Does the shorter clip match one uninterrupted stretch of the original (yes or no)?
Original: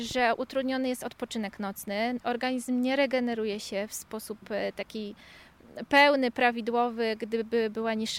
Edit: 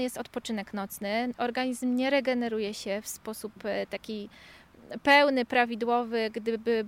yes